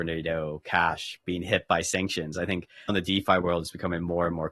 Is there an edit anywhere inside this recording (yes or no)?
yes